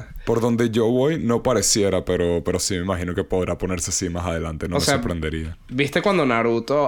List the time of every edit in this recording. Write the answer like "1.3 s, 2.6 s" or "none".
none